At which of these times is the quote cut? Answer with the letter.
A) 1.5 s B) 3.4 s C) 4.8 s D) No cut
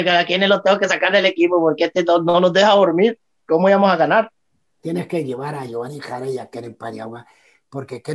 C